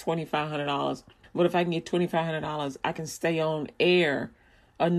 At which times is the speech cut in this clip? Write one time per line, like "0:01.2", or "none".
0:01.2